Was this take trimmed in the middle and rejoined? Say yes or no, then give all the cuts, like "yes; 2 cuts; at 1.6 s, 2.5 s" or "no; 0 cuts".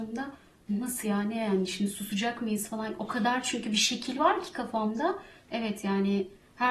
no; 0 cuts